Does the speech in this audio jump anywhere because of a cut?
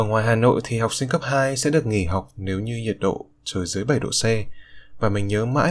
no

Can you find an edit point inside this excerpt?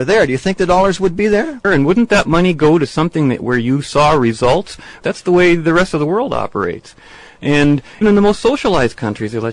yes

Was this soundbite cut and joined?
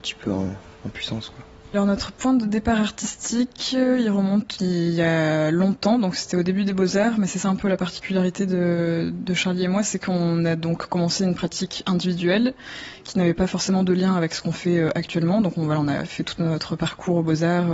yes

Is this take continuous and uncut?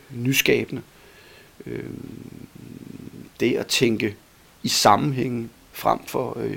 yes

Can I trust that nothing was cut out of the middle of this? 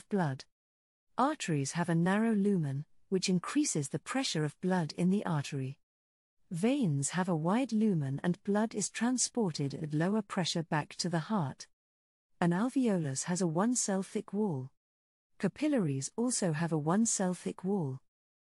yes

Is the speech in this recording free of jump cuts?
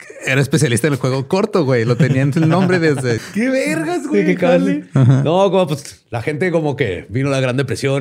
no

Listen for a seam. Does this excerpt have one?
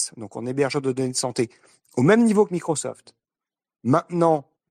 no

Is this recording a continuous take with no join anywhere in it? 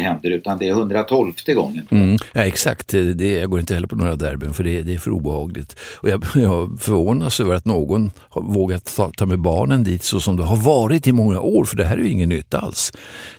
yes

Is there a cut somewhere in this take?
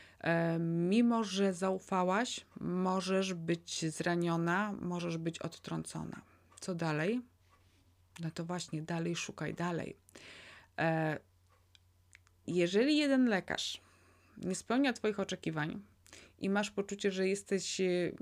no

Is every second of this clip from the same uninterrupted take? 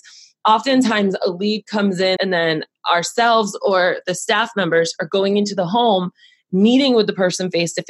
no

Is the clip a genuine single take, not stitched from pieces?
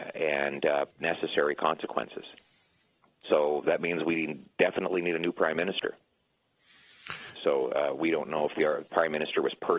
no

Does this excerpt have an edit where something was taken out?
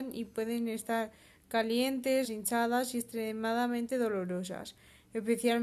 yes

